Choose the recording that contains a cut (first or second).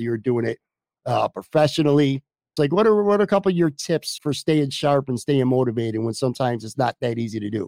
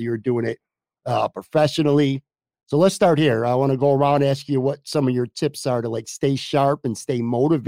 first